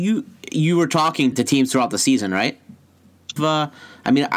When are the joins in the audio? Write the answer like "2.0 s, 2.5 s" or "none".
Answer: 1.3 s, 3.4 s